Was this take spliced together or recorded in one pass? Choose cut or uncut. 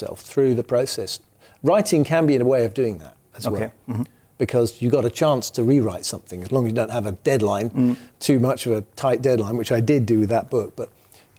uncut